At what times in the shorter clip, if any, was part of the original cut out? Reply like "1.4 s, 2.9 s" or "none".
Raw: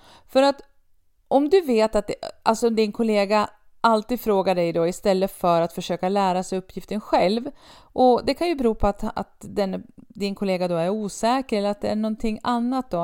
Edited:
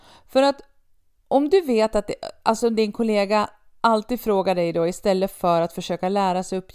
none